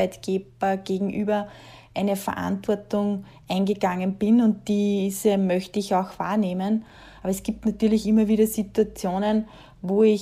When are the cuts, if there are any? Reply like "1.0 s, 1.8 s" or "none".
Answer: none